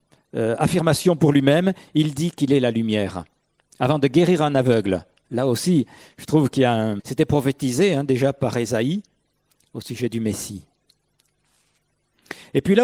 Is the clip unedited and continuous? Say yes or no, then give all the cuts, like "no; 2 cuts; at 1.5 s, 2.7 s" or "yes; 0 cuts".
no; 1 cut; at 7.0 s